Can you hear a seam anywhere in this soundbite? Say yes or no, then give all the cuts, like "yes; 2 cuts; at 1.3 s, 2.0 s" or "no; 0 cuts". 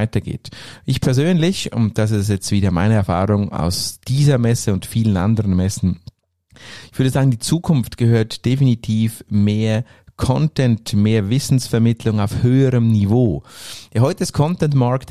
no; 0 cuts